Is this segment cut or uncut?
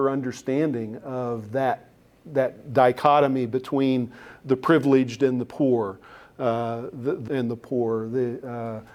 cut